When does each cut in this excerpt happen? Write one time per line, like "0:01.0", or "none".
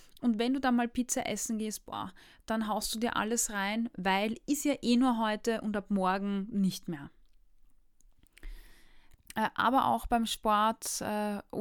0:09.2